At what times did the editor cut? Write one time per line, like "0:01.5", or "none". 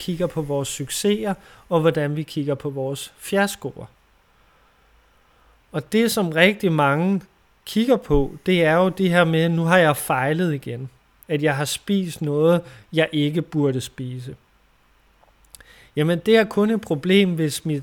0:11.2